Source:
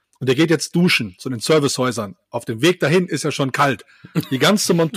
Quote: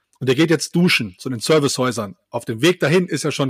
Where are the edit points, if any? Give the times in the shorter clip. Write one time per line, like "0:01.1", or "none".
none